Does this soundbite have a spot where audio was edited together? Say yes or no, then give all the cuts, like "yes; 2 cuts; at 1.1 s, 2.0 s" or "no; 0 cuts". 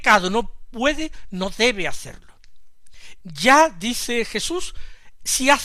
yes; 1 cut; at 3.2 s